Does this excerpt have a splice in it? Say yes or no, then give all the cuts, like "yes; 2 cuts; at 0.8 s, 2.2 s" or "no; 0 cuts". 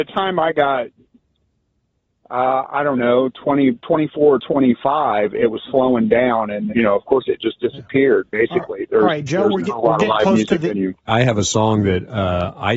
yes; 2 cuts; at 6.7 s, 11.1 s